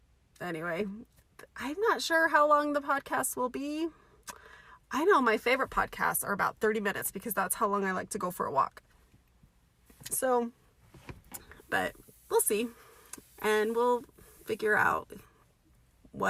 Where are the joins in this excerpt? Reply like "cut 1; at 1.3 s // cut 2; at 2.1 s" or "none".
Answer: cut 1; at 11.6 s